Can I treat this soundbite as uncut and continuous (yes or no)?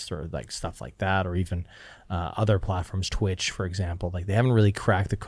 yes